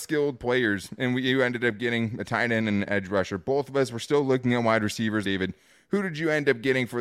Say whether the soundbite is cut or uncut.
cut